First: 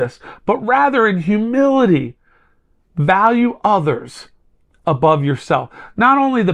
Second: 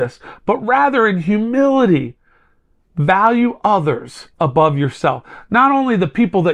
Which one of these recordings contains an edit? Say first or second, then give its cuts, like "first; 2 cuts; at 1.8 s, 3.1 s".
second; 1 cut; at 4.3 s